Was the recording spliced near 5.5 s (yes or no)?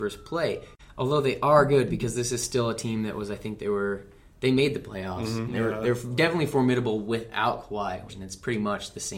yes